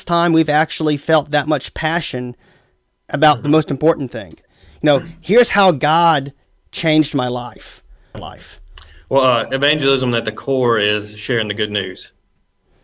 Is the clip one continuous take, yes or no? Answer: no